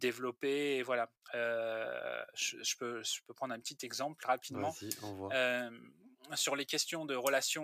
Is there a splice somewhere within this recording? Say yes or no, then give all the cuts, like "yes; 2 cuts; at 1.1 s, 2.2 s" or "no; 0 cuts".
yes; 1 cut; at 1.2 s